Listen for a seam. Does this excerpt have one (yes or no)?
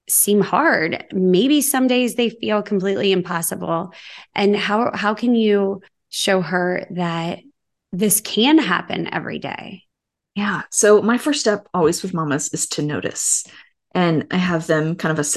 no